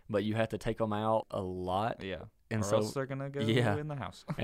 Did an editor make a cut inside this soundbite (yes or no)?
yes